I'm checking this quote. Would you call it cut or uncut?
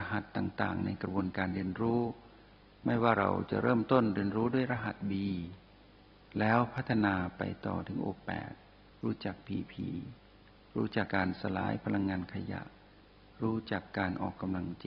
cut